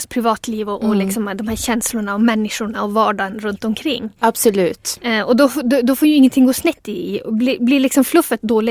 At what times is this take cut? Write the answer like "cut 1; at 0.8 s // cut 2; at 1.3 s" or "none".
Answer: none